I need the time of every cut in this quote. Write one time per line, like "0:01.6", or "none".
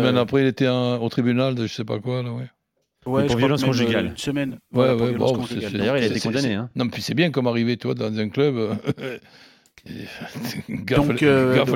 none